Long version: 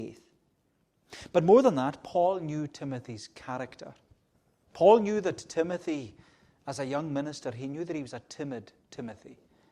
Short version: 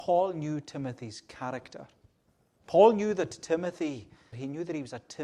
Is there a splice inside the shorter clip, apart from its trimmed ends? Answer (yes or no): yes